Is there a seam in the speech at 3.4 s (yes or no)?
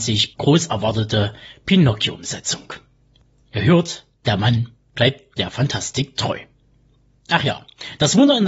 no